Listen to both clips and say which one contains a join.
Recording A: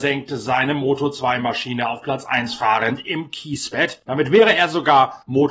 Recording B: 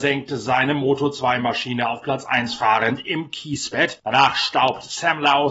B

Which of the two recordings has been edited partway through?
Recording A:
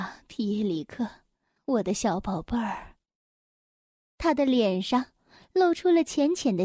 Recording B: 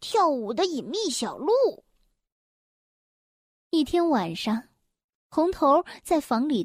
A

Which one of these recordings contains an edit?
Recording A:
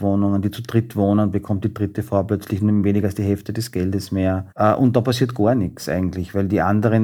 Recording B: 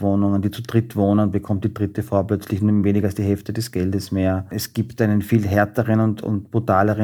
A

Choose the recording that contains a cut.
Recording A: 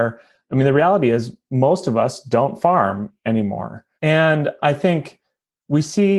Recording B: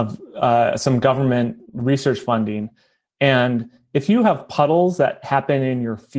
A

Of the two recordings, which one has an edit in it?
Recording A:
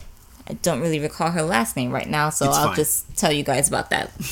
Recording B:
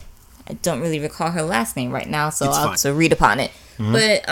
B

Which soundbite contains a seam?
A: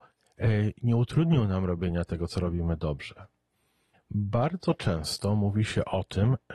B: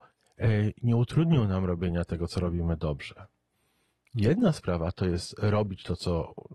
A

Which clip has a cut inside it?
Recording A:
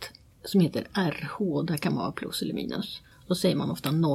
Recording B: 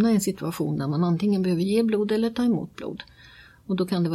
A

